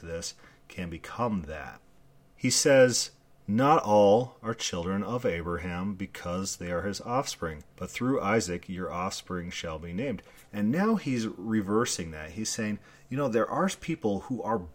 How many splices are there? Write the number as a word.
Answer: one